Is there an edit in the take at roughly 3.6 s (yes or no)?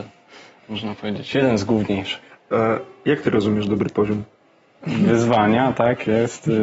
no